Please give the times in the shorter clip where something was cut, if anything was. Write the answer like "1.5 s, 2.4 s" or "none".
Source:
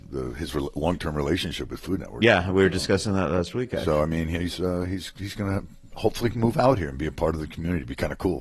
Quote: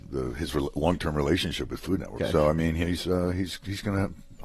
2.2 s